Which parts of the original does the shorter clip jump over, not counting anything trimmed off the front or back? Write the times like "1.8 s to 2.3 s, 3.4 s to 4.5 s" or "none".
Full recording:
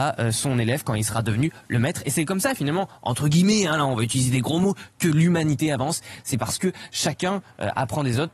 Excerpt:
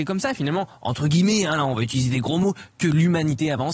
none